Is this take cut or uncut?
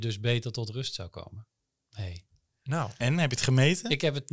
uncut